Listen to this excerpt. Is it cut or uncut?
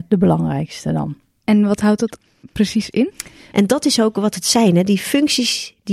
cut